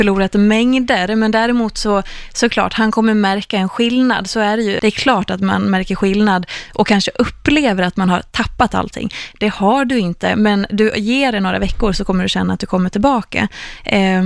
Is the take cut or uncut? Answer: cut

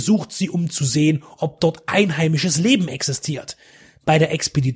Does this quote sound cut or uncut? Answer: uncut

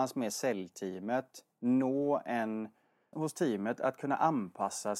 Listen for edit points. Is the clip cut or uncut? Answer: cut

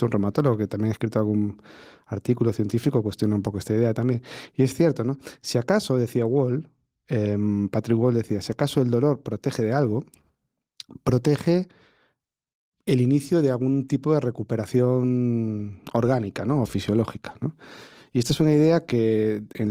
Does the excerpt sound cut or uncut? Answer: uncut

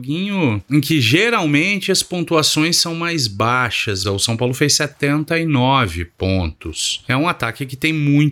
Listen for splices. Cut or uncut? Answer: cut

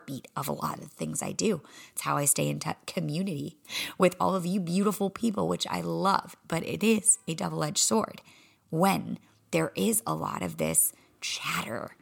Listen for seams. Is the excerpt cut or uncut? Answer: uncut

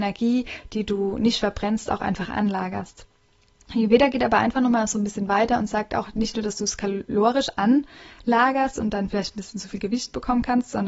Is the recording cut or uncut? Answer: uncut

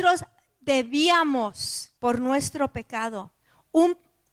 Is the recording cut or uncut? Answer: cut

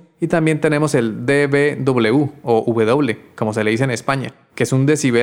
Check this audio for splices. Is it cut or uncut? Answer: uncut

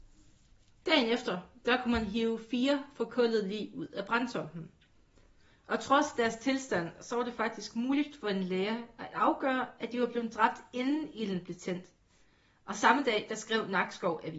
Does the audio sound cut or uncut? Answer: uncut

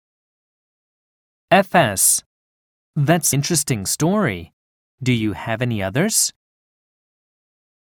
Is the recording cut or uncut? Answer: cut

